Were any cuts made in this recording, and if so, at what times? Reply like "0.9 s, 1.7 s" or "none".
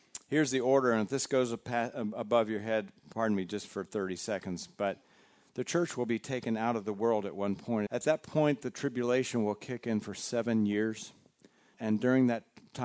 7.9 s, 11.7 s